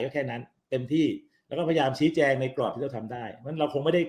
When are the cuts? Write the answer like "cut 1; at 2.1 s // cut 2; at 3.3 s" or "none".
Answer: none